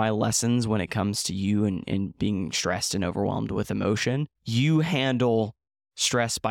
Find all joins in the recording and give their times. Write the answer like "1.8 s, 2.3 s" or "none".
4.4 s